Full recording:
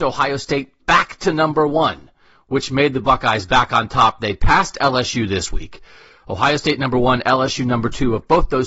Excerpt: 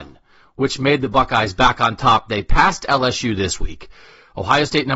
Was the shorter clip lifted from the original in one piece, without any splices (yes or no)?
yes